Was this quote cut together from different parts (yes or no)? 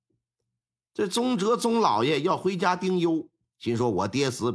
yes